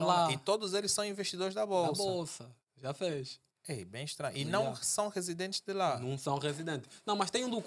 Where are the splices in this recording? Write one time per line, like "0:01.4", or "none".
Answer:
none

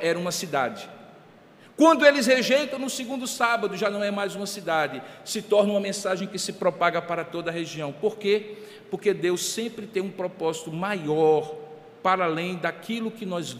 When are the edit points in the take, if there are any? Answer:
none

